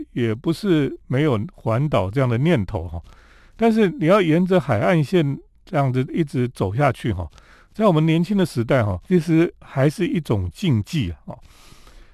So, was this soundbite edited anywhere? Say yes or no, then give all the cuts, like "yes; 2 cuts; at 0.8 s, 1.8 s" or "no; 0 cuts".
yes; 1 cut; at 9.0 s